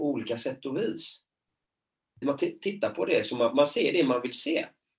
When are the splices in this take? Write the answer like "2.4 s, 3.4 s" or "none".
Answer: 2.2 s